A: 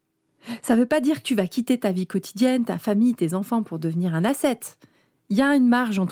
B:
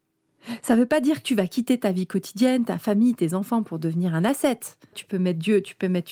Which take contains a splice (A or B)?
B